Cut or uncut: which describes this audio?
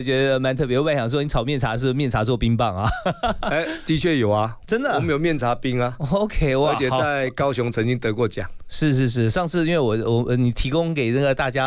uncut